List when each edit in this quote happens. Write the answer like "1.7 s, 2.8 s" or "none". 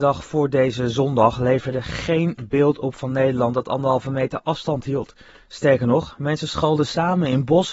none